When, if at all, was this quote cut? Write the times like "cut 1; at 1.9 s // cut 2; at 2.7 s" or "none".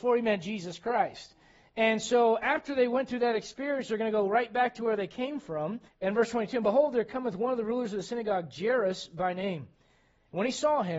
cut 1; at 5.9 s